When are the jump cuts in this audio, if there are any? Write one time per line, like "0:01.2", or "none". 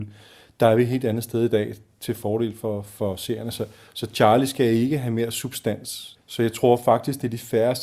0:06.2